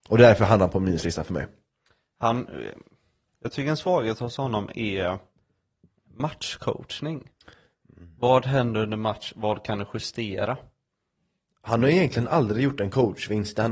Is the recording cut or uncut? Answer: uncut